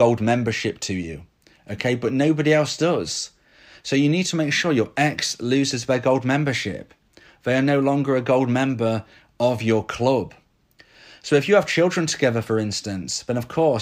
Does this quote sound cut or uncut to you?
uncut